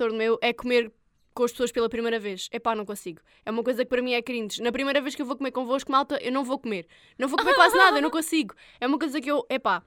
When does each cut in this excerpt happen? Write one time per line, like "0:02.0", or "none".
none